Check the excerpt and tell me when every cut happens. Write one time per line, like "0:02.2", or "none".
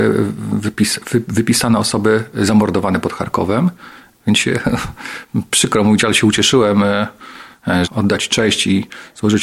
0:04.2
0:07.8